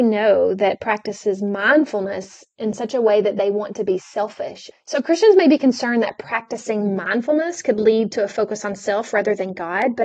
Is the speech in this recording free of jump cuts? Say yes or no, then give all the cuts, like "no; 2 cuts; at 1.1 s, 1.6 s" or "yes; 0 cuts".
no; 1 cut; at 4.7 s